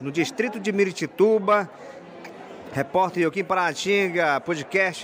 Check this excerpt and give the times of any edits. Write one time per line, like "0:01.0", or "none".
none